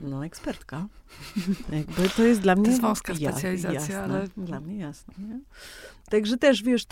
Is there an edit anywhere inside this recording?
no; 0 cuts

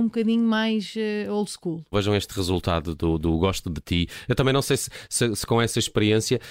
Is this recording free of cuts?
no; 2 cuts; at 1.9 s, 4.3 s

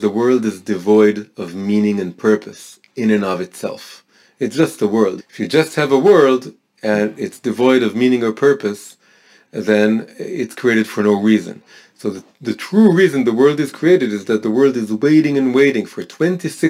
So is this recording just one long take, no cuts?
no; 1 cut; at 5.2 s

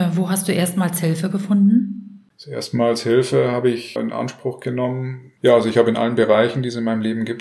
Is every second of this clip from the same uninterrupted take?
no; 2 cuts; at 4.0 s, 5.4 s

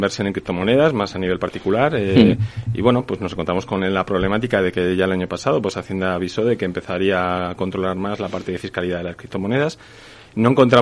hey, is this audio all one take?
yes; 0 cuts

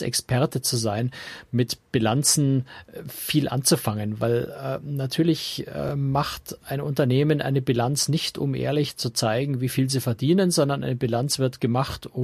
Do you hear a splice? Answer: no; 0 cuts

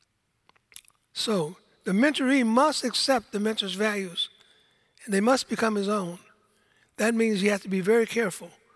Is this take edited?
no; 0 cuts

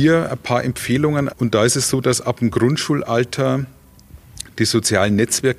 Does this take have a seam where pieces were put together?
yes; 1 cut; at 1.3 s

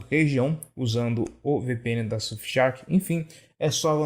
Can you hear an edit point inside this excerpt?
no; 0 cuts

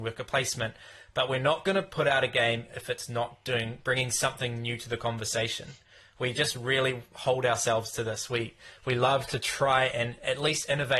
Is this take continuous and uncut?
yes; 0 cuts

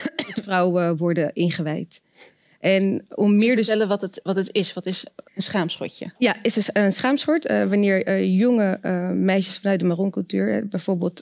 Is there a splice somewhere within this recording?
yes; 1 cut; at 5.3 s

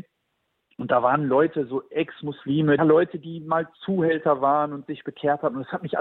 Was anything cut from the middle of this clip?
yes; 1 cut; at 2.8 s

